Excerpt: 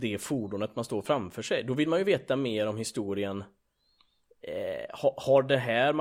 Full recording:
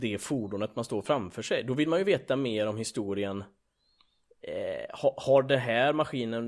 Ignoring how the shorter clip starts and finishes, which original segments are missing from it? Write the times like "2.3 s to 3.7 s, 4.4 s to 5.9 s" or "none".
none